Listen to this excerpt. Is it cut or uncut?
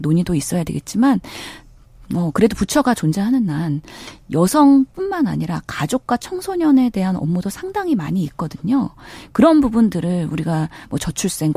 uncut